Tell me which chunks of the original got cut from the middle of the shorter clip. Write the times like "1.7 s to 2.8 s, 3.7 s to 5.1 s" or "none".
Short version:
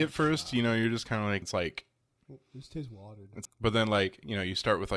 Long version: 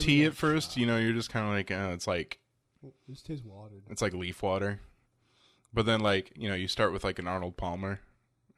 1.7 s to 2.0 s, 4.0 s to 5.6 s